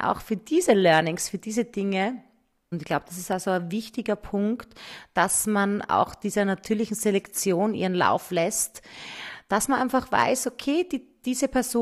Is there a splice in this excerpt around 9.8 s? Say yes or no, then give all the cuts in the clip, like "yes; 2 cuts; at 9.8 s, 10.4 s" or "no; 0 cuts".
no; 1 cut; at 2.7 s